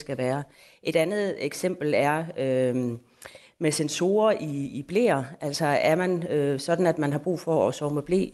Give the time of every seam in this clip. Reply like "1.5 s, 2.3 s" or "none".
none